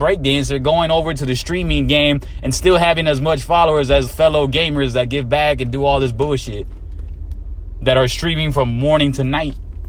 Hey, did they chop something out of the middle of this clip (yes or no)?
yes